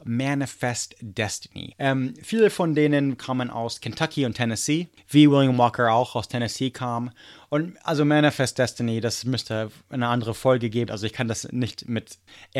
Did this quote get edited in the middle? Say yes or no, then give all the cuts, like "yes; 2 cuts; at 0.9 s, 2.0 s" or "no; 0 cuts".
yes; 2 cuts; at 1.7 s, 10.9 s